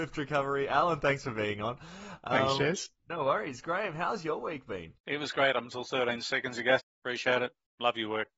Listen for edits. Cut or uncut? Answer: cut